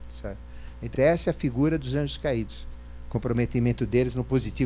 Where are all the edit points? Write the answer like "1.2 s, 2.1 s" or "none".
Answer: 0.9 s

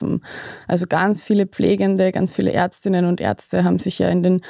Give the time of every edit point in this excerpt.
none

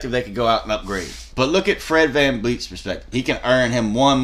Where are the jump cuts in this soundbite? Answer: 1.3 s, 3.1 s

